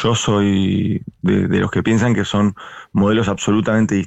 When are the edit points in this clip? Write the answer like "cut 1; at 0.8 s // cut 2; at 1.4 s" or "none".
none